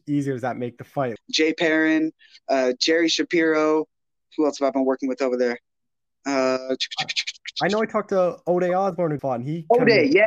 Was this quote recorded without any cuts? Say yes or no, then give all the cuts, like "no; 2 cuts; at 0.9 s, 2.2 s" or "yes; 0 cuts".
no; 2 cuts; at 1.2 s, 9.2 s